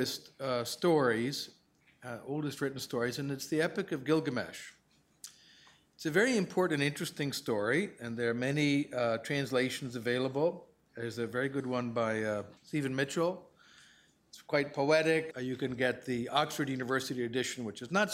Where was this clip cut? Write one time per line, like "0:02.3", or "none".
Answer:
0:12.6
0:15.3